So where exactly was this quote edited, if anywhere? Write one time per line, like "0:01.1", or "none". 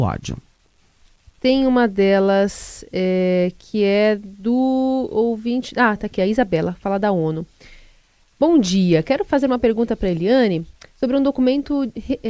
0:01.4